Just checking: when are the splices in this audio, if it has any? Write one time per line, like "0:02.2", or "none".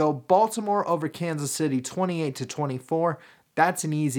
none

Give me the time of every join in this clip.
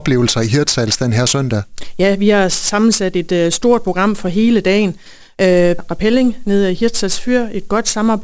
0:05.8

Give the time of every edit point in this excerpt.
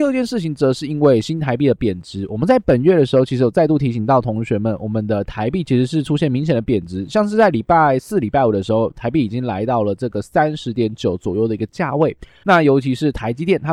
0:12.4

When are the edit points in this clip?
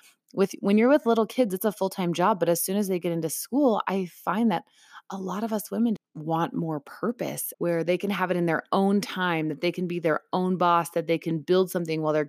0:06.0
0:07.5

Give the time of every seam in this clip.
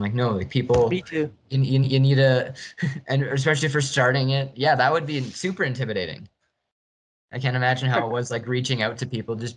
none

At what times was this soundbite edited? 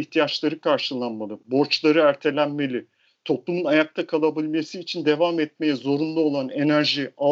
none

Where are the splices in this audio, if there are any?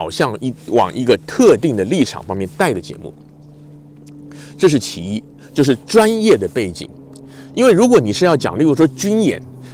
none

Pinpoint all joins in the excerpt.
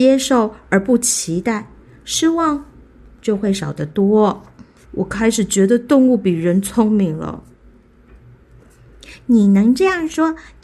0:04.8

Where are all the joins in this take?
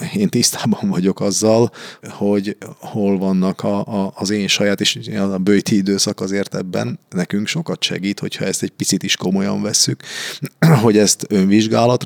0:02.0

